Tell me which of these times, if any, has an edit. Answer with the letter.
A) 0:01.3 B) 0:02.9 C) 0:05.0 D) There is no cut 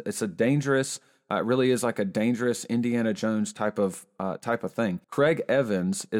C